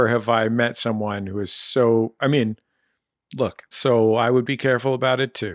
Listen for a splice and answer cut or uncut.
cut